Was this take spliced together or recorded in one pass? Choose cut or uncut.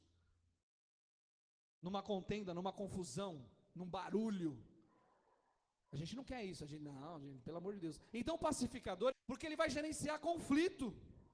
cut